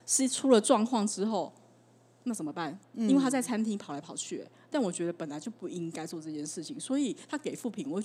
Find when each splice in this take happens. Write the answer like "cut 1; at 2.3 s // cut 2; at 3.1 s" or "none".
none

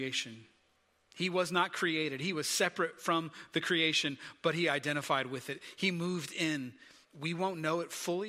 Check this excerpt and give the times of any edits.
cut 1; at 7.0 s

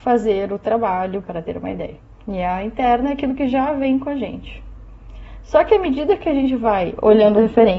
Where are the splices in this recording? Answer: cut 1; at 1.2 s

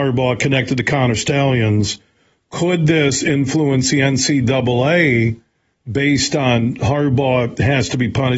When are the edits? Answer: none

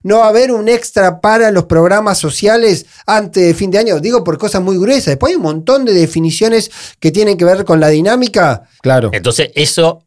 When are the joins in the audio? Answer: cut 1; at 8.8 s

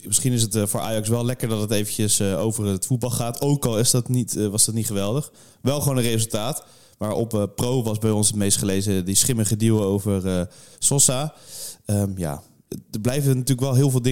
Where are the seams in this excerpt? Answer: none

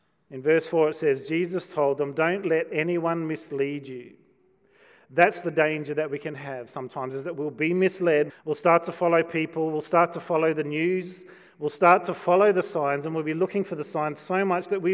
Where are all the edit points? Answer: cut 1; at 8.3 s

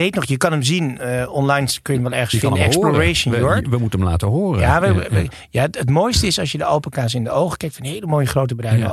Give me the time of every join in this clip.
none

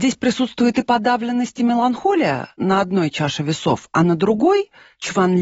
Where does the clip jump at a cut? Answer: none

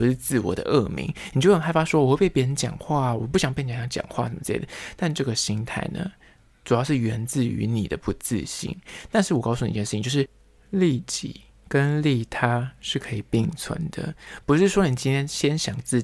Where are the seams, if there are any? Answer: none

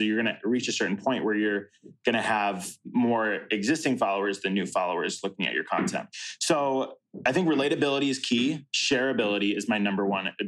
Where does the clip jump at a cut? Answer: none

